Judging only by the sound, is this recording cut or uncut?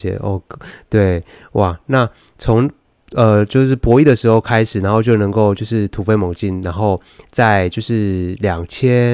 uncut